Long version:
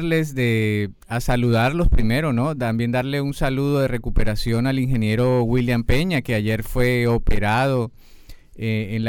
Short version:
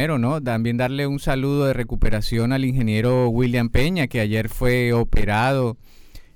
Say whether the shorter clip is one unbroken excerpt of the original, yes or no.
yes